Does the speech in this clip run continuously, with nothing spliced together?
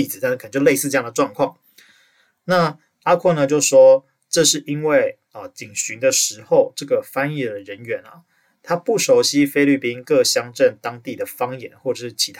yes; 0 cuts

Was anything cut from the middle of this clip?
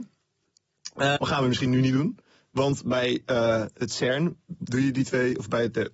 yes; 1 cut; at 1.2 s

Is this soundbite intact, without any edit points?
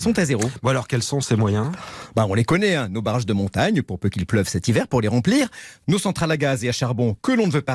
yes; 0 cuts

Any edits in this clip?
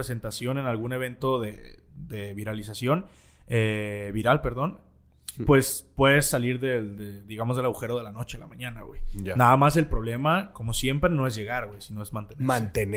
no; 0 cuts

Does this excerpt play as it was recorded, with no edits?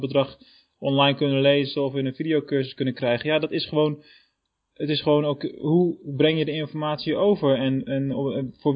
yes; 0 cuts

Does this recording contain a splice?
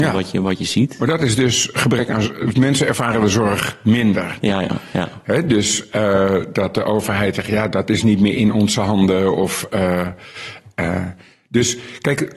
no; 0 cuts

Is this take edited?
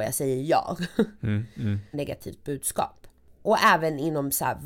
yes; 1 cut; at 1.9 s

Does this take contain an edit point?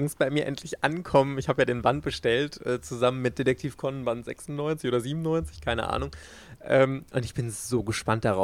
no; 0 cuts

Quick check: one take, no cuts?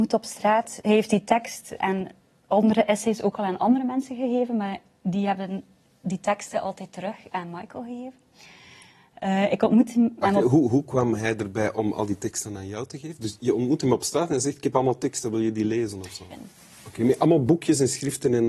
no; 2 cuts; at 1.8 s, 16.3 s

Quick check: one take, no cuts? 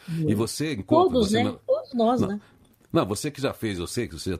yes; 0 cuts

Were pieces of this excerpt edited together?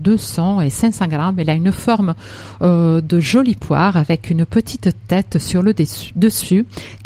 no; 0 cuts

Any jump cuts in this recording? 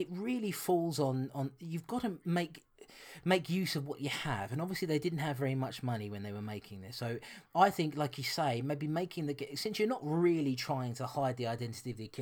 no; 0 cuts

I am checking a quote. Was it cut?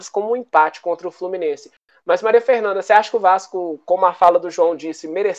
no; 0 cuts

